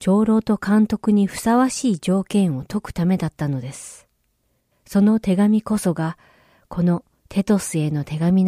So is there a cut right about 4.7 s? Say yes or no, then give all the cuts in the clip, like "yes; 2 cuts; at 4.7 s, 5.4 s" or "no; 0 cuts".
yes; 1 cut; at 4.7 s